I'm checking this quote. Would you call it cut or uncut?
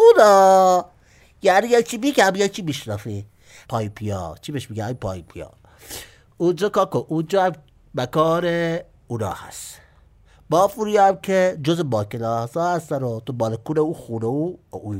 cut